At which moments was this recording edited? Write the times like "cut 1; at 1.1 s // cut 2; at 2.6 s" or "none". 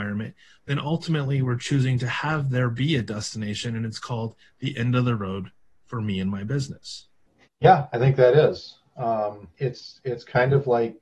cut 1; at 7.5 s // cut 2; at 9.5 s